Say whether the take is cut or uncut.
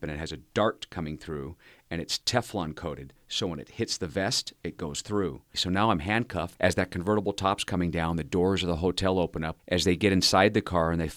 cut